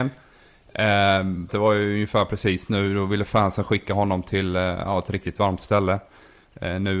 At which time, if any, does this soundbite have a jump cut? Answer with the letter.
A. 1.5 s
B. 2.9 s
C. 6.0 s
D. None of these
A